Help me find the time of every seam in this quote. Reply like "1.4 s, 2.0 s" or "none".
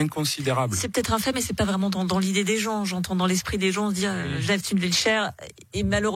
none

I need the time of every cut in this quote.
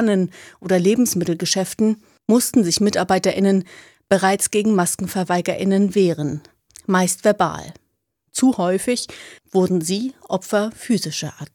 none

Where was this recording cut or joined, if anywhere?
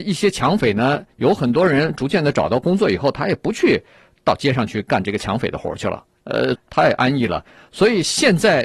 6.5 s

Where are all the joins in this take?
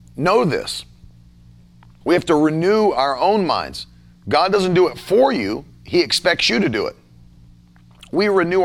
2.0 s

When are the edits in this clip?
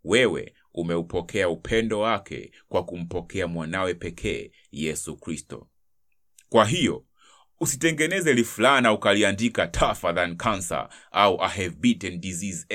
none

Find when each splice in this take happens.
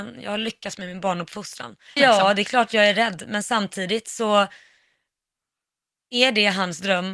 2.0 s

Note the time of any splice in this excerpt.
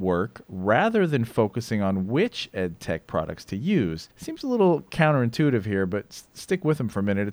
4.1 s

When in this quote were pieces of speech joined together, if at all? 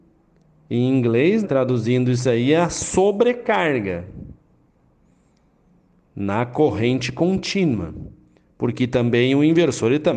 1.4 s

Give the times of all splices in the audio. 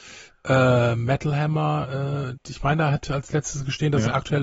2.3 s

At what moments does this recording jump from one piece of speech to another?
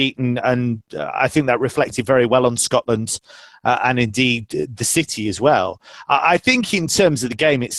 none

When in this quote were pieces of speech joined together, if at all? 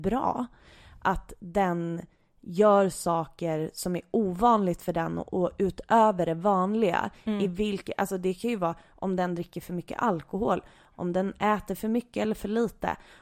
none

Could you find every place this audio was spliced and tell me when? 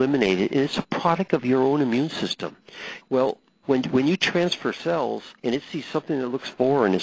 3.0 s, 5.4 s

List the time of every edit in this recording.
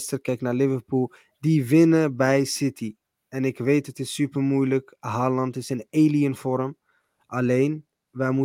none

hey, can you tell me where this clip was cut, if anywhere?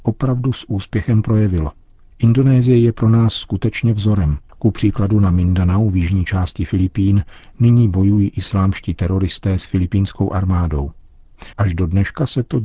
4.5 s, 11.5 s

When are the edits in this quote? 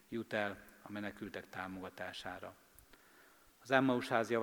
none

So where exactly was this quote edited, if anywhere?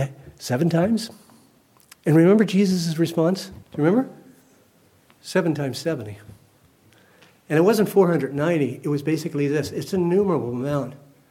3.6 s

